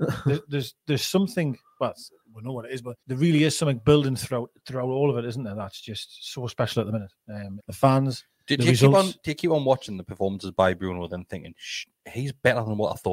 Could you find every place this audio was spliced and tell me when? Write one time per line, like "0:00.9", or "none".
0:03.0
0:07.6

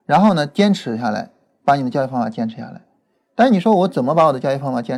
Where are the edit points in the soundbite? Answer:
none

